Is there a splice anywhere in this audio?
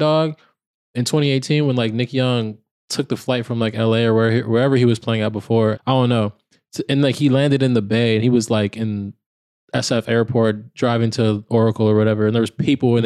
yes; 1 cut; at 5.7 s

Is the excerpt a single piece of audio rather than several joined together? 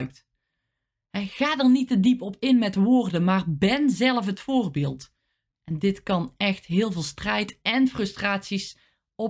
no; 1 cut; at 5.5 s

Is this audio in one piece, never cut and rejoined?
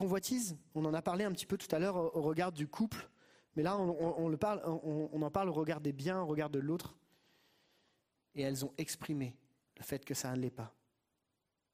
no; 1 cut; at 8.2 s

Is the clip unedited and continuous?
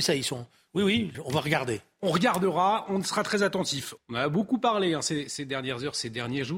no; 2 cuts; at 1.1 s, 4.0 s

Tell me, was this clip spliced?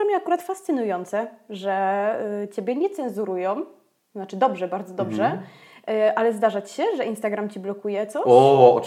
no; 0 cuts

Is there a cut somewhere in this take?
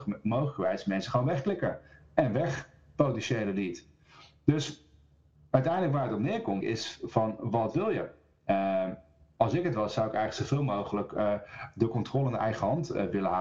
yes; 1 cut; at 6.6 s

